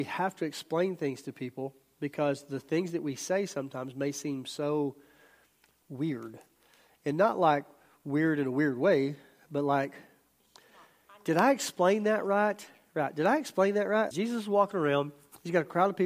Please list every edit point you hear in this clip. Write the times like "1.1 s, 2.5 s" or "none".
14.1 s